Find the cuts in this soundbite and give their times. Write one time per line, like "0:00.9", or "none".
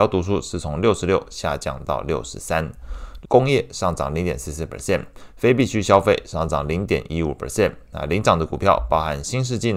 0:03.2